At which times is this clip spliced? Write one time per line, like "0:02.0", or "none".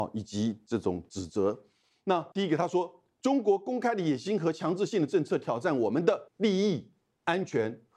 0:02.3
0:06.3